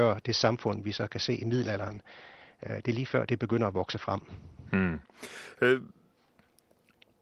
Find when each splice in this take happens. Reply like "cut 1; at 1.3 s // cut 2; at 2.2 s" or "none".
none

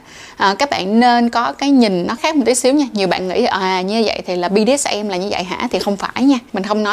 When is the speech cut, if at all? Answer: cut 1; at 2.2 s

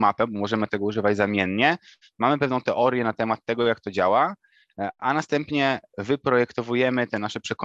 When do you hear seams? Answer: none

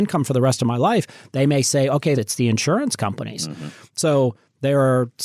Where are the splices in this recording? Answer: cut 1; at 2.1 s

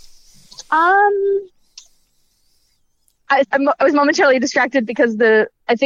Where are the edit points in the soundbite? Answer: cut 1; at 3.4 s

